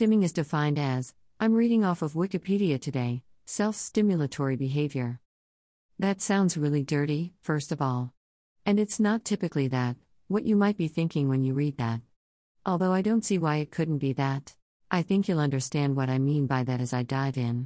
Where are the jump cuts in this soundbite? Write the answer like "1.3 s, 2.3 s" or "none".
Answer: 14.8 s

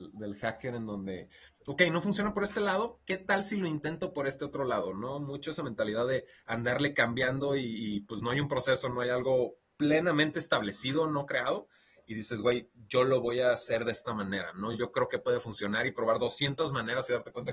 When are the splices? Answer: none

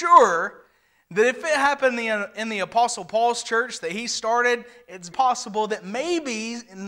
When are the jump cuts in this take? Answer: 5.1 s

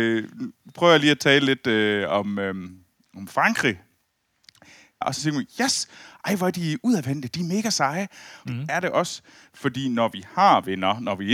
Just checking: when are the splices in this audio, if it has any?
5.0 s, 8.4 s

